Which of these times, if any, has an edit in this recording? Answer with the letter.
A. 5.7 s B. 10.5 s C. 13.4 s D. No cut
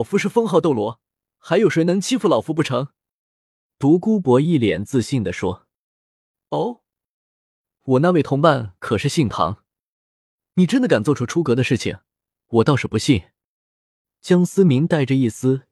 D